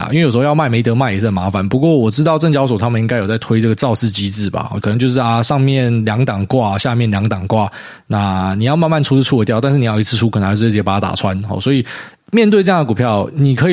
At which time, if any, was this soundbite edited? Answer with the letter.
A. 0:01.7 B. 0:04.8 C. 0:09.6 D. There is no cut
B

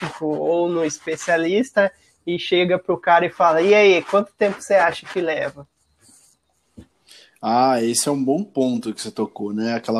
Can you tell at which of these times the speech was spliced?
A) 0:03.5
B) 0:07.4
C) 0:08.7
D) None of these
D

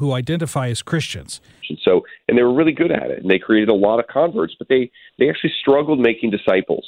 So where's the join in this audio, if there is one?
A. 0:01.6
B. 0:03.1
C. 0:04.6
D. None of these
A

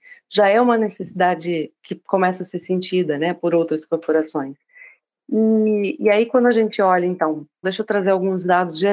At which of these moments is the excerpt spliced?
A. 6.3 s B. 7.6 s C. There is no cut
B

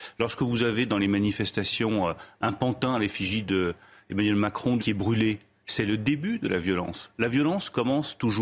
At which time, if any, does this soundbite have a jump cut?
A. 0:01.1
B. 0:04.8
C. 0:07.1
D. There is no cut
B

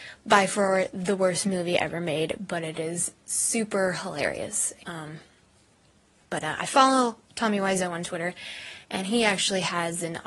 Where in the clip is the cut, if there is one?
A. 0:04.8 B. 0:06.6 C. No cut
A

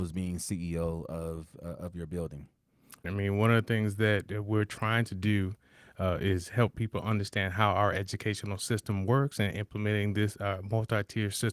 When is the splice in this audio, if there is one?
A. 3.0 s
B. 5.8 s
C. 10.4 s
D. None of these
A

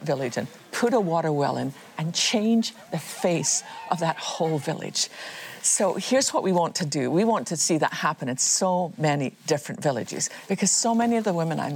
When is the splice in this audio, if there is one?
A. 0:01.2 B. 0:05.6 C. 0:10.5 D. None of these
C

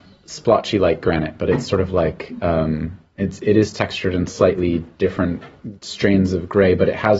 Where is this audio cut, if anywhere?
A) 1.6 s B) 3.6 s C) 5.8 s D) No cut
C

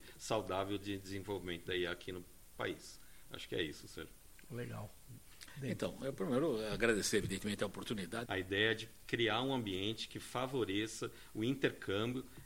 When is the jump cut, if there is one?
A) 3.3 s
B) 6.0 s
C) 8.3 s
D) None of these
C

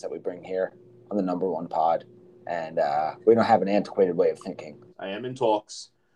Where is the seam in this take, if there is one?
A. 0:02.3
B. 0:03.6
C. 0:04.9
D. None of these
C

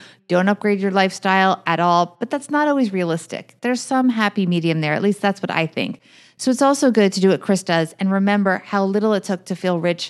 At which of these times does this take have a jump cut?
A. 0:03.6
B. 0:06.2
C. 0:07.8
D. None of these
D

